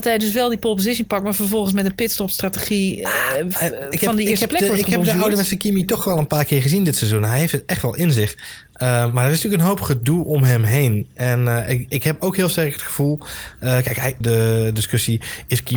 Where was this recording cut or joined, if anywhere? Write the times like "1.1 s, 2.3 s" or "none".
14.2 s

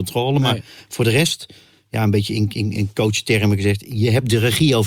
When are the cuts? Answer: none

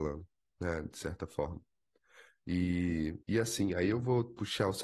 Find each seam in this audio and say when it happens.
3.2 s

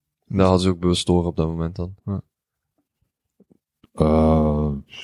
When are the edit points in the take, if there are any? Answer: 2.0 s, 3.8 s

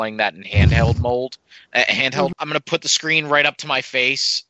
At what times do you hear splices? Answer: 2.3 s

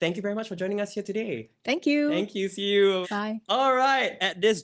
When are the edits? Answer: 3.0 s

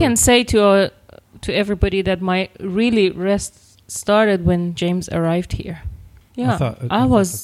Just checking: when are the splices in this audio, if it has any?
6.3 s

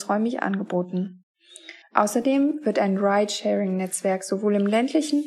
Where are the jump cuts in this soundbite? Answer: 1.8 s

